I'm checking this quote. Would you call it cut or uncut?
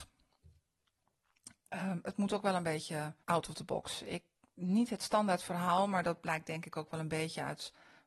cut